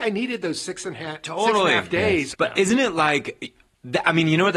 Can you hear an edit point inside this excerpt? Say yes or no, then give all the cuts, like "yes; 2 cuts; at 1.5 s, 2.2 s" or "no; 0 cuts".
yes; 1 cut; at 2.3 s